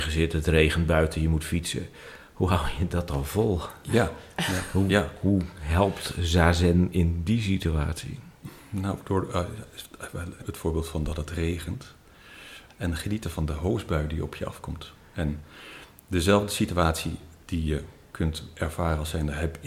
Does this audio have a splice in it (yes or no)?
yes